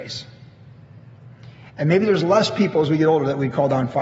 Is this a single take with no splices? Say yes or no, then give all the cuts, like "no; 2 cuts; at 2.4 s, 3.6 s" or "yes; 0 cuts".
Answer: no; 1 cut; at 1.7 s